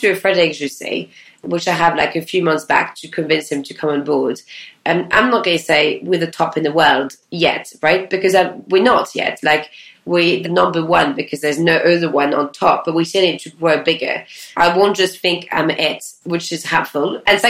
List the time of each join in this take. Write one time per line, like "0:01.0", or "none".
0:10.4
0:14.5